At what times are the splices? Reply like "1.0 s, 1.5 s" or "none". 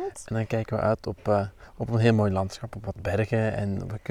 none